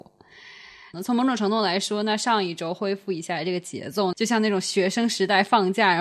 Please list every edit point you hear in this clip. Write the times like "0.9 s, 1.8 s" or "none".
0.9 s, 4.1 s